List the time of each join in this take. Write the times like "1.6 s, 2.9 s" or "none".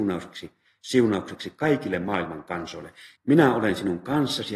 3.2 s